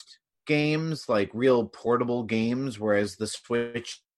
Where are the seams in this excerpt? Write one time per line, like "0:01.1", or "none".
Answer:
none